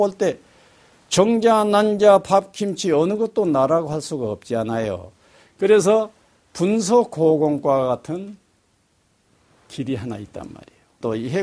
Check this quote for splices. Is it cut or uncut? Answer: cut